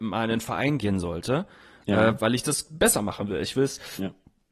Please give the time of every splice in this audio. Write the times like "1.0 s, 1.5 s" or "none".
none